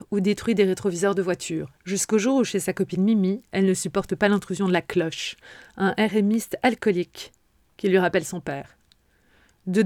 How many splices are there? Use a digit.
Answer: 1